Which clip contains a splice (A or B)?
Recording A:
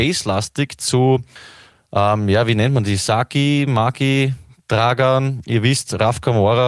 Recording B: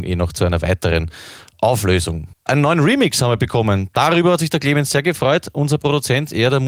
B